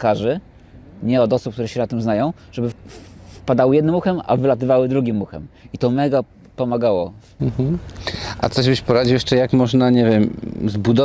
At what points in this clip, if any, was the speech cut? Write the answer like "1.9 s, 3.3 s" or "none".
2.7 s